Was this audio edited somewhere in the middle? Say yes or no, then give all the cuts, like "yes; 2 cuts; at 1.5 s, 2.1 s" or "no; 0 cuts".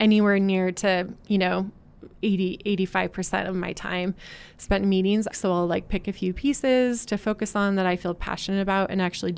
yes; 1 cut; at 5.3 s